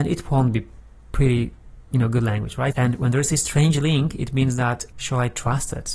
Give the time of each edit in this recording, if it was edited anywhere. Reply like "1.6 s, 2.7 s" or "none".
2.7 s, 4.9 s